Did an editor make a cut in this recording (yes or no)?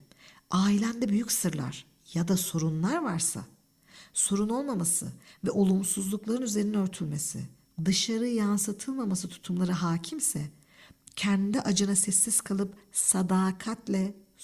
yes